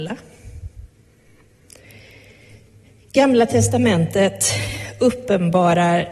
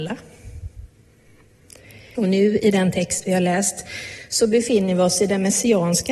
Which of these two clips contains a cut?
second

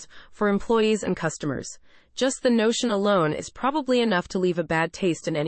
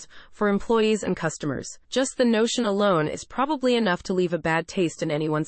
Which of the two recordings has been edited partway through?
second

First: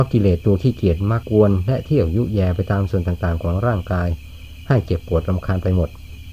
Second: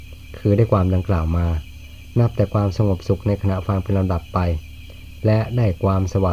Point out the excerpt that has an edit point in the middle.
first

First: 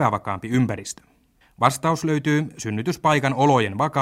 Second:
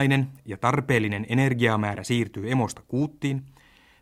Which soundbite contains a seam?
first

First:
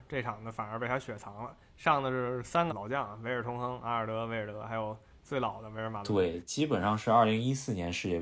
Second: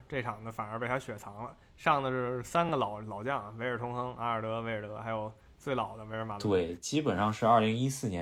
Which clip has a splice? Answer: first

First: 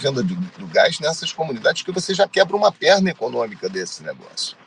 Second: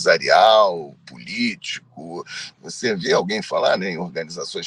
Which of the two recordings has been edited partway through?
second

